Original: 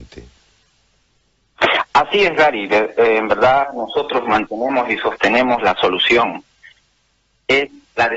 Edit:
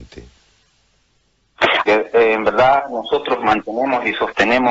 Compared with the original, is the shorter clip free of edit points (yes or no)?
no